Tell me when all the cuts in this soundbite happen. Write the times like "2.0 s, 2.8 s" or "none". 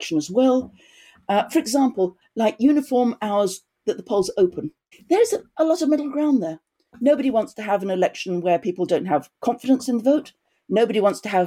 2.2 s, 4.9 s